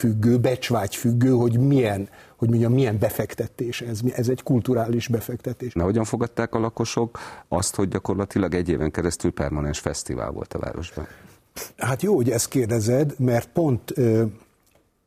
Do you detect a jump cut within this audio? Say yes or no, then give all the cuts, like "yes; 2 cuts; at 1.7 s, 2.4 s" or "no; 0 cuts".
yes; 2 cuts; at 5.8 s, 11.7 s